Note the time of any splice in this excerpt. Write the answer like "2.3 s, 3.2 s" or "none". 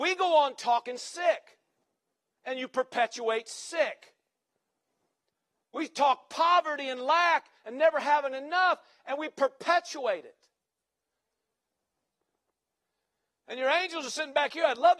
none